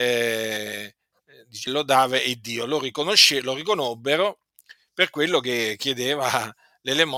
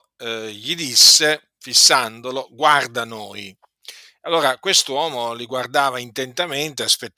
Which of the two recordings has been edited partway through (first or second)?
first